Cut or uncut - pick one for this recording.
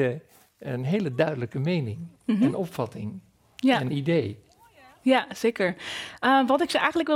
uncut